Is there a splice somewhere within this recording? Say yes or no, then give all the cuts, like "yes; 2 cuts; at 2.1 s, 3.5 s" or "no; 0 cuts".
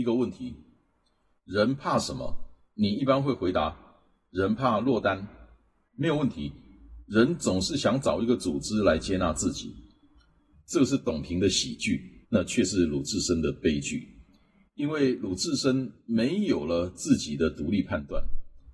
yes; 2 cuts; at 10.5 s, 12.2 s